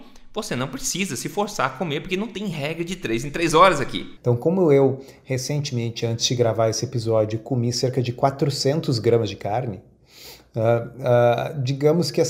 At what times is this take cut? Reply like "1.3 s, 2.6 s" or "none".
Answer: 4.2 s